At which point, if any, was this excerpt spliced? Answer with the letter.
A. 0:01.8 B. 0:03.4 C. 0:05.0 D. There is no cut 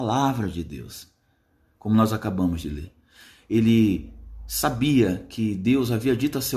D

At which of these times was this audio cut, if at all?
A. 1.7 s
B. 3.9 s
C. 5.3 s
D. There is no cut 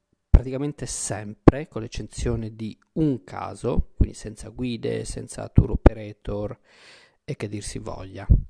B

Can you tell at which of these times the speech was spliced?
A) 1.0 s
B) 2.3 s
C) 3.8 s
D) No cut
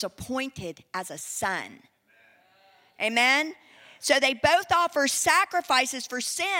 D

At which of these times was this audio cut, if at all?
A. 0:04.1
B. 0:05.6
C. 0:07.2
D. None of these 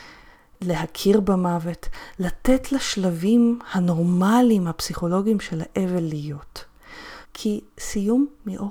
C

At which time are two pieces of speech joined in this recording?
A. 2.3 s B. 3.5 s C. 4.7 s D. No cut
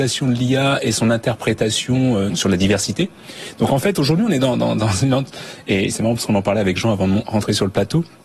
A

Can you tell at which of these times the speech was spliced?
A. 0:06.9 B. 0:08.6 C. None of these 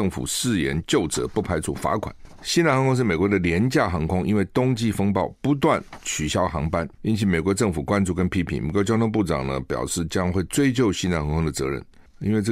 A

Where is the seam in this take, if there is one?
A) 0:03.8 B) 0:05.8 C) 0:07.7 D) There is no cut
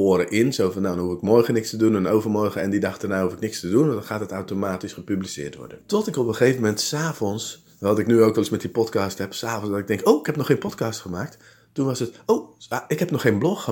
B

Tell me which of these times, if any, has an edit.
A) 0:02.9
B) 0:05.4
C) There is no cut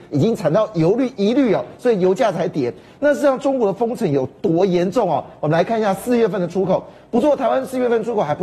C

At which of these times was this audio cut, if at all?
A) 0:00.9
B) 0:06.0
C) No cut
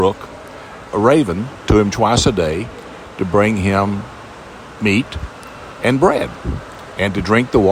A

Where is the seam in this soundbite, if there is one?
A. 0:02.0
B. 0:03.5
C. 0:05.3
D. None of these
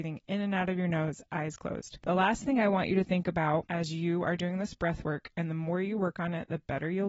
D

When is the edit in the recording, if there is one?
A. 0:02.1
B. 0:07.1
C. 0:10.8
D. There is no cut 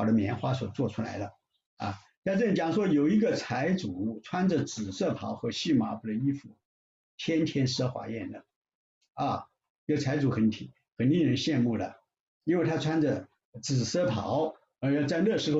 A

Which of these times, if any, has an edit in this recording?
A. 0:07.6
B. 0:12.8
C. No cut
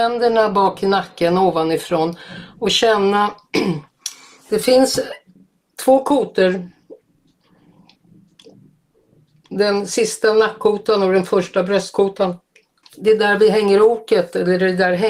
B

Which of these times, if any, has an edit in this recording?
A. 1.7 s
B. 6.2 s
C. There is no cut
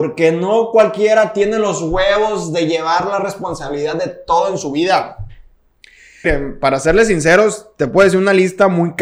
B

